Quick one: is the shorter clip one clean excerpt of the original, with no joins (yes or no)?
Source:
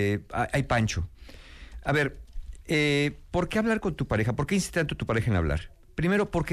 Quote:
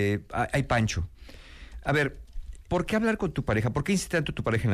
no